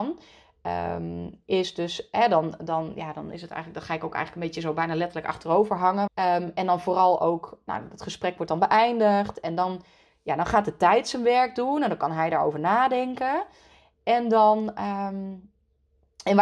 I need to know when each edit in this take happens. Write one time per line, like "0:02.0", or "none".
0:06.1

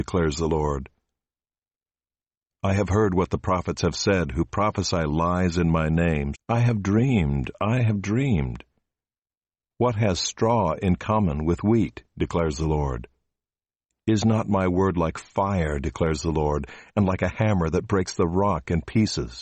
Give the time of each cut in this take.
0:06.3
0:09.7

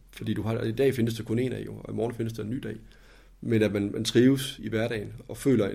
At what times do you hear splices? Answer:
0:04.6

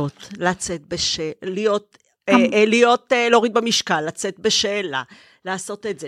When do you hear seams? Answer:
none

